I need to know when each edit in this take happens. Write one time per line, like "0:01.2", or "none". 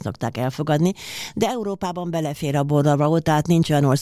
none

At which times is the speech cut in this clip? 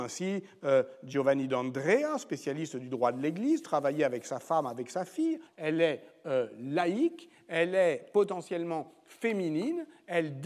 0:05.5

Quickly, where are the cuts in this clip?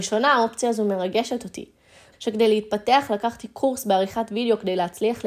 0:02.1

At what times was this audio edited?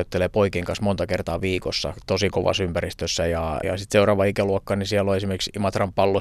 0:03.6

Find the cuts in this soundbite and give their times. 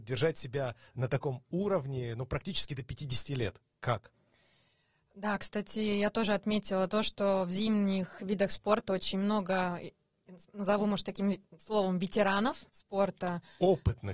0:12.7

